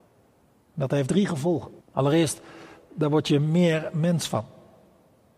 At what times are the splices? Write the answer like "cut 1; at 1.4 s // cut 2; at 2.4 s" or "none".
cut 1; at 1.8 s